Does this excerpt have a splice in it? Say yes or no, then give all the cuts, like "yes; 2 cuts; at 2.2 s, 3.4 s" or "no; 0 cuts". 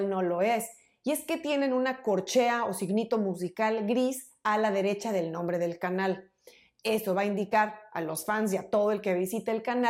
no; 0 cuts